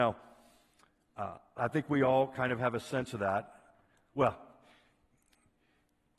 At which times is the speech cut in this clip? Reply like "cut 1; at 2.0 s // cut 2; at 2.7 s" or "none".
cut 1; at 1.6 s